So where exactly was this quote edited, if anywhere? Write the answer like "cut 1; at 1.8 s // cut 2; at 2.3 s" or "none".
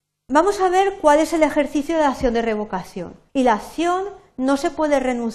cut 1; at 3.3 s